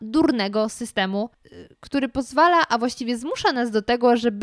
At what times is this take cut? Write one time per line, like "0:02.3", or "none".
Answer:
none